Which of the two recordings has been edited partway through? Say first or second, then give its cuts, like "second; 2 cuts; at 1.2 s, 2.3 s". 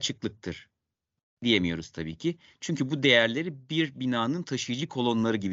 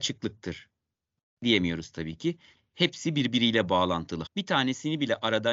second; 2 cuts; at 2.6 s, 4.3 s